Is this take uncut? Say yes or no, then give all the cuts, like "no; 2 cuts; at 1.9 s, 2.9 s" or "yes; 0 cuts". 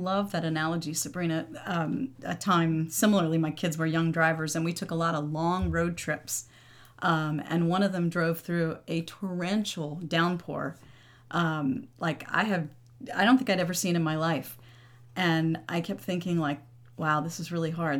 no; 1 cut; at 2.1 s